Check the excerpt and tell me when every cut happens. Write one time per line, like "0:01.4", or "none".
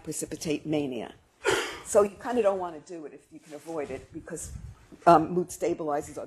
none